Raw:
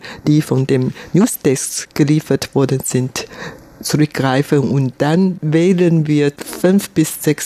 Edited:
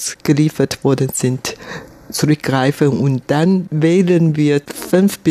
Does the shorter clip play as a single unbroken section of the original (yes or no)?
yes